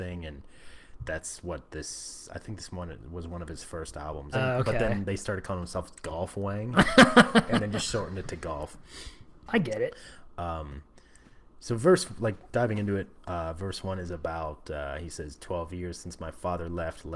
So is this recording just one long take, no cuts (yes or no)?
no